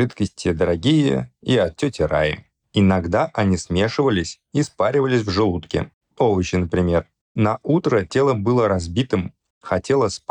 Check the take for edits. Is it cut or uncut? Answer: cut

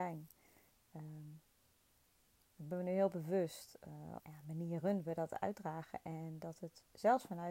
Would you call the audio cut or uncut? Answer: cut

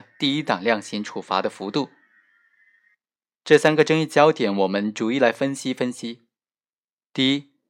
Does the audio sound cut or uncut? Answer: uncut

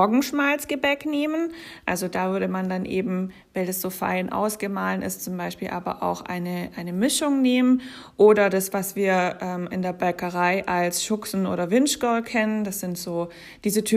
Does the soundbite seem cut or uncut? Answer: uncut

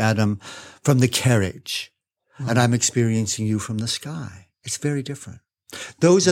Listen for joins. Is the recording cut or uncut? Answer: uncut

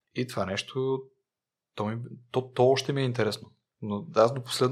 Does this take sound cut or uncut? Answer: uncut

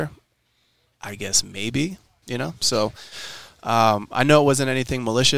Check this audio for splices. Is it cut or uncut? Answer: cut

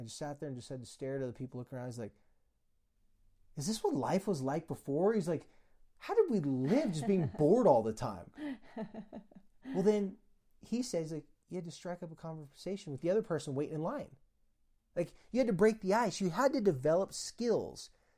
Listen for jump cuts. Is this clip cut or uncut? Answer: uncut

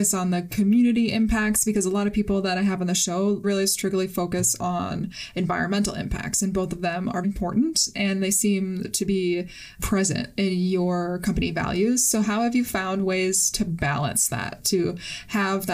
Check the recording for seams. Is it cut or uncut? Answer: cut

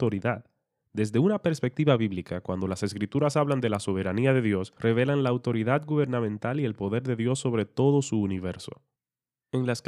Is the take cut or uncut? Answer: uncut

